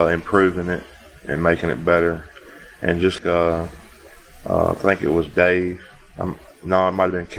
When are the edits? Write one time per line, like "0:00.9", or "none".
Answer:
0:03.2